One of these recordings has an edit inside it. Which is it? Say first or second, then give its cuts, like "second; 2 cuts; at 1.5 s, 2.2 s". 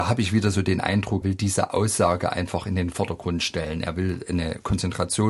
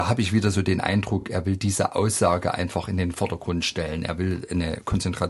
first; 1 cut; at 1.2 s